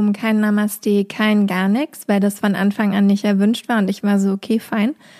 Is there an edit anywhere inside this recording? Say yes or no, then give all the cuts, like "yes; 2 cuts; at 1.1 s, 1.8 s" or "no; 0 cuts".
no; 0 cuts